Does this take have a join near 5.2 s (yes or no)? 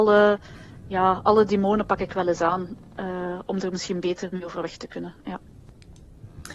no